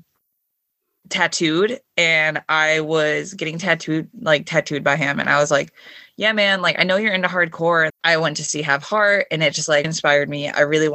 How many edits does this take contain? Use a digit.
2